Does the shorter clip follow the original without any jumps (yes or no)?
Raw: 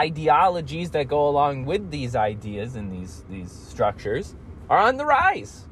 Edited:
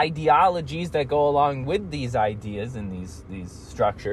yes